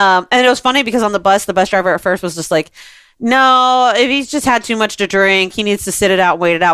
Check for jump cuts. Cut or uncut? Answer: cut